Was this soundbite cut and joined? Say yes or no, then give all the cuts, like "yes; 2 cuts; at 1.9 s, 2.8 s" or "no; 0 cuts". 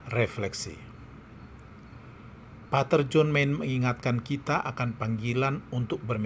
no; 0 cuts